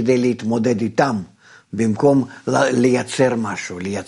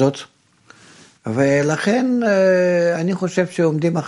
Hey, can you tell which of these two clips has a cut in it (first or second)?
second